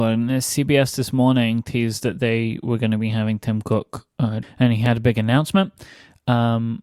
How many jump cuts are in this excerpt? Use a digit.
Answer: 1